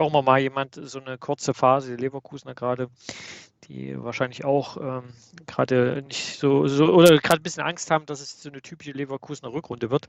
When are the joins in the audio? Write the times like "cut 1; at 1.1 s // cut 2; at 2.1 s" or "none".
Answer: none